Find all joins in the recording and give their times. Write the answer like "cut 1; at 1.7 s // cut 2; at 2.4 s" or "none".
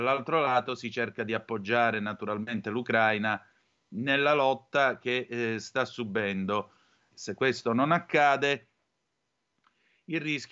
cut 1; at 7.1 s

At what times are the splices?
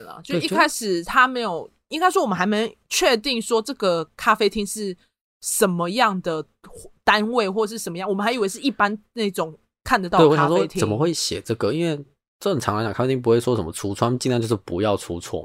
none

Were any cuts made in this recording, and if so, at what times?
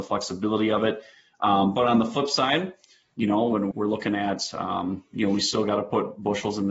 cut 1; at 3.7 s

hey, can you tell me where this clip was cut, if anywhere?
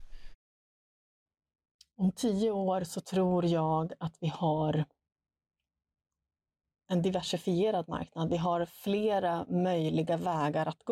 none

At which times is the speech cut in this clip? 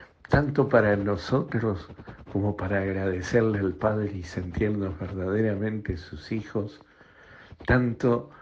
none

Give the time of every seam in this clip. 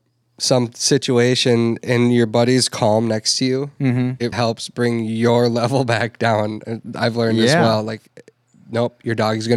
cut 1; at 4.3 s

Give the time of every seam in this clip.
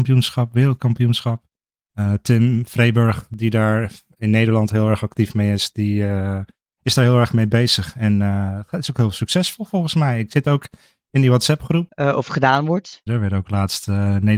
cut 1; at 11.9 s // cut 2; at 13.1 s

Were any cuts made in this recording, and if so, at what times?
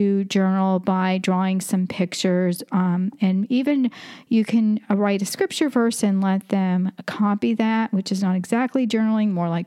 none

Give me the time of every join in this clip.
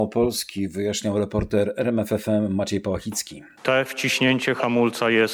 cut 1; at 3.6 s

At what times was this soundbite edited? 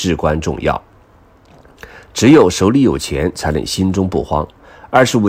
none

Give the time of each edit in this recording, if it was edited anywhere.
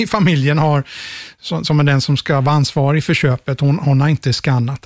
none

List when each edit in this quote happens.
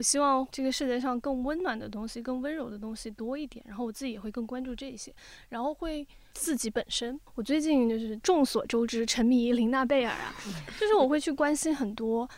cut 1; at 6.3 s

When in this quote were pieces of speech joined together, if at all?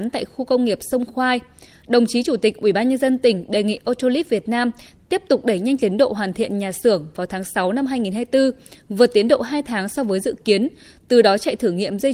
none

